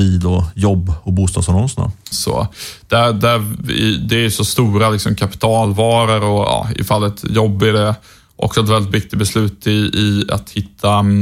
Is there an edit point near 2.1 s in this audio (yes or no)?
yes